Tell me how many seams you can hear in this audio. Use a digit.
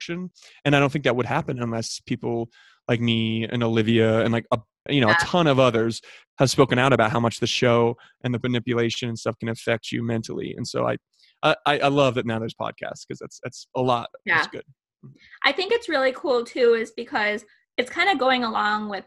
1